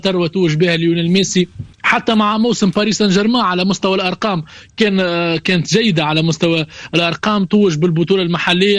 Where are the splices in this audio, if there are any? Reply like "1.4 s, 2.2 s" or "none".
1.7 s